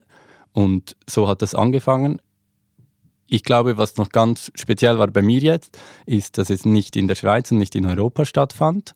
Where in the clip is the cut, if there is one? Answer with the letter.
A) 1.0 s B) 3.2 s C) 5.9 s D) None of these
D